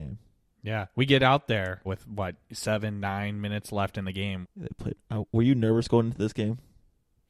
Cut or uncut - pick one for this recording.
cut